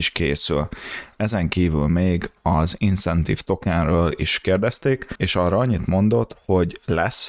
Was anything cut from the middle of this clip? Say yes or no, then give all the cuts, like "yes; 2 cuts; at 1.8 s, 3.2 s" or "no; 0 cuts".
no; 0 cuts